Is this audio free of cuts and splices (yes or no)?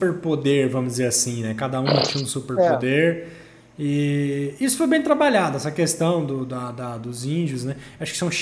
yes